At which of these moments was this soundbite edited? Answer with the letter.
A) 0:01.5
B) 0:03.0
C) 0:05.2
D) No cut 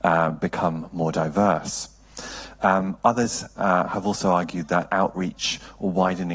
D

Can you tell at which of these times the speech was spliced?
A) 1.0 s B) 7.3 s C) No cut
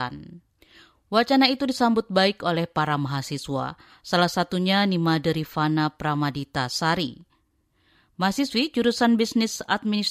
C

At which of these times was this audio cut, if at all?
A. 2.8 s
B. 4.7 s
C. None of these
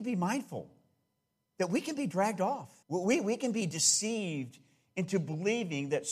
A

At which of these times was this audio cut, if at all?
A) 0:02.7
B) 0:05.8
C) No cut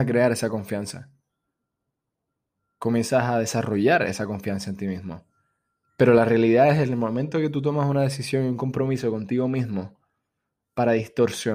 B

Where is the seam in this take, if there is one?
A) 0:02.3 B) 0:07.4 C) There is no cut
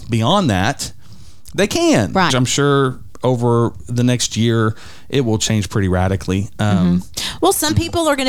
A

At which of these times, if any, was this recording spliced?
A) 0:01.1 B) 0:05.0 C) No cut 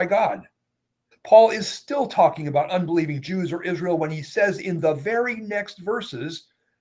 A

